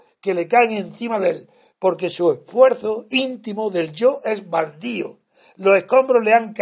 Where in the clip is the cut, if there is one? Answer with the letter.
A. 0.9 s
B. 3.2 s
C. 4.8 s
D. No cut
D